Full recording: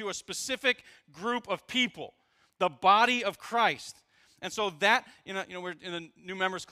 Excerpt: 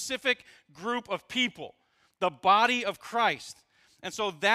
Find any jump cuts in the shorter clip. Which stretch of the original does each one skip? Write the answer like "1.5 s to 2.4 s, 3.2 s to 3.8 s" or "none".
none